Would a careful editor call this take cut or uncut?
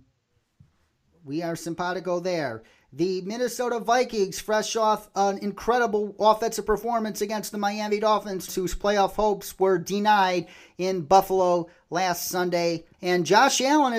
cut